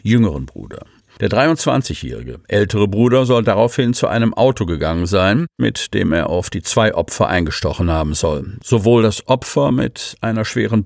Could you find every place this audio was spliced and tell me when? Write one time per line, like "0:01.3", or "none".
0:05.6
0:08.6

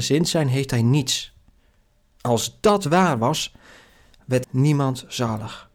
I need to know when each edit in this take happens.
0:04.4

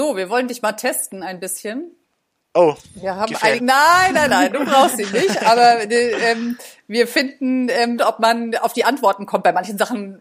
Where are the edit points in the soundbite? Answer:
0:03.6
0:08.0

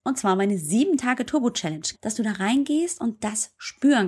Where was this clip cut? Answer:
0:01.9

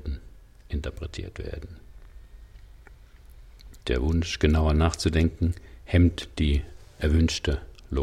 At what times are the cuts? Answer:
0:03.8

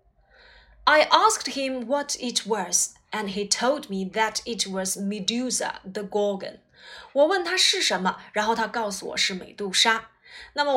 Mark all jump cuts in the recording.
none

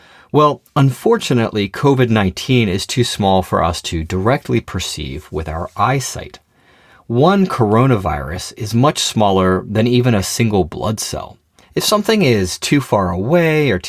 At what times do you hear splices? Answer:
0:11.6

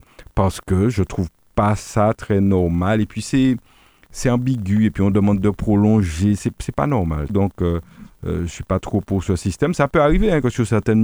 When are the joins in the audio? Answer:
0:07.3

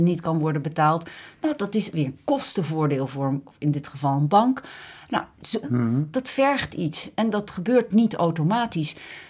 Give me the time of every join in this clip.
0:05.6

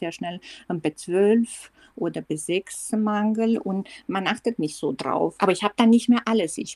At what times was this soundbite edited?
0:05.4

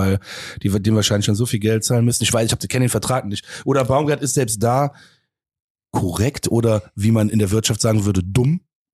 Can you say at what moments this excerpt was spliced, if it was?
none

